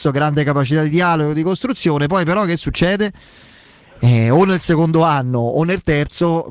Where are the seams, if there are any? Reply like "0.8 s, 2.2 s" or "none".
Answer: none